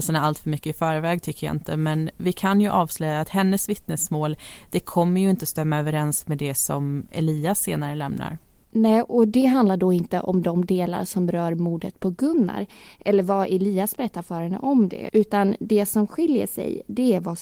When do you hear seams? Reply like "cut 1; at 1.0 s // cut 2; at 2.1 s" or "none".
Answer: none